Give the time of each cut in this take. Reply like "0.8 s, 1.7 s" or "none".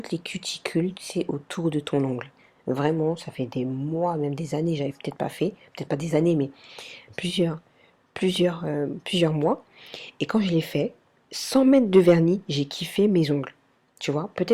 none